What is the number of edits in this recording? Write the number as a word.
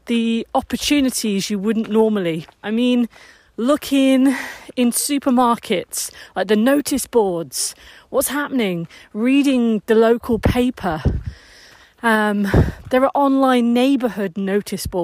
one